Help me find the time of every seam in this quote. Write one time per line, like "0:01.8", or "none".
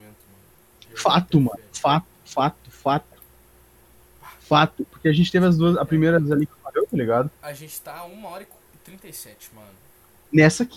0:04.9